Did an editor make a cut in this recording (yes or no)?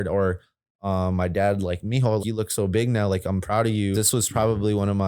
yes